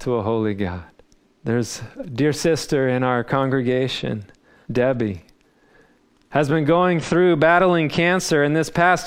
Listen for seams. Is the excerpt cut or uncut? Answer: cut